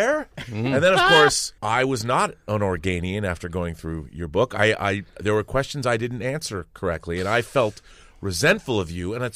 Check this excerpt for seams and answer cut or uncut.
cut